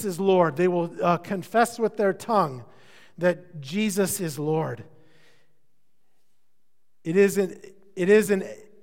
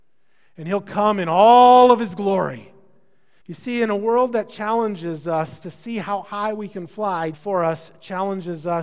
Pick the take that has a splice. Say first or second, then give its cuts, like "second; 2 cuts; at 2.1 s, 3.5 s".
second; 2 cuts; at 3.4 s, 7.3 s